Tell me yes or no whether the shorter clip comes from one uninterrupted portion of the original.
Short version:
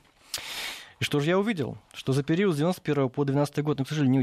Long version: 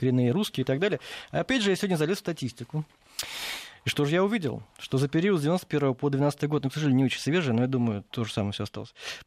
yes